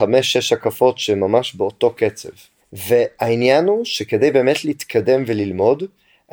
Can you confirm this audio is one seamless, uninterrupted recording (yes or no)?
no